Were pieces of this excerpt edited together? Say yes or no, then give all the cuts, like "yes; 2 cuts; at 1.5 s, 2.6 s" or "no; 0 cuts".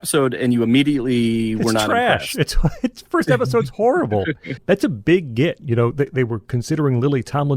yes; 1 cut; at 4.6 s